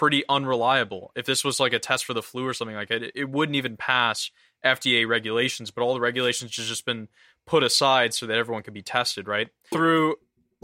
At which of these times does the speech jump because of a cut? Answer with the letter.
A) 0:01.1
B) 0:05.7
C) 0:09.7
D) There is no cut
C